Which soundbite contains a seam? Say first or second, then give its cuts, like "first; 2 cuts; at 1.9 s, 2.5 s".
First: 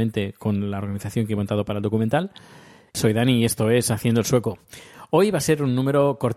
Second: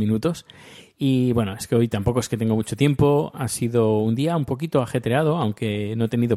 first; 1 cut; at 2.9 s